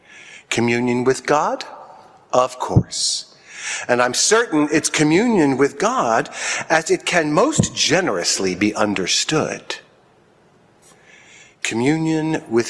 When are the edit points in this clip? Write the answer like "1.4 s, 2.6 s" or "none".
none